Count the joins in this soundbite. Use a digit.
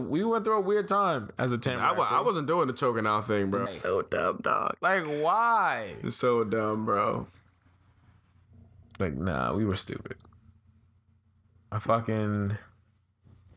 1